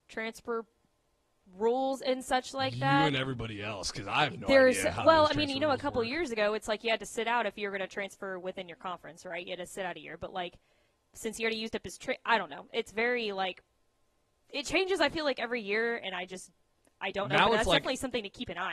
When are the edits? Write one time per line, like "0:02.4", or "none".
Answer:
none